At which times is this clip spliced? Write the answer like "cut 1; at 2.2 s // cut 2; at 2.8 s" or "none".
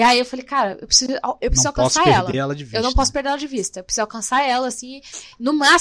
none